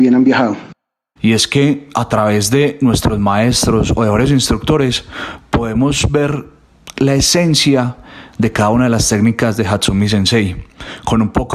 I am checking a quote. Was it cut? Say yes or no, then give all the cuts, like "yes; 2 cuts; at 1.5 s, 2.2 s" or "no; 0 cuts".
yes; 1 cut; at 1.2 s